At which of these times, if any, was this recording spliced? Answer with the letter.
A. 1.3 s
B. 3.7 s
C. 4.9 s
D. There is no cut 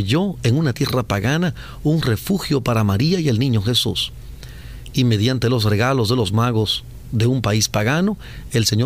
D